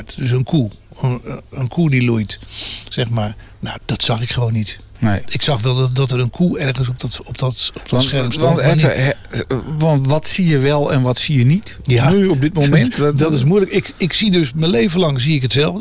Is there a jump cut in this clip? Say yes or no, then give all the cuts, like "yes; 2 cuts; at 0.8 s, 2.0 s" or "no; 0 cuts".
yes; 1 cut; at 3.8 s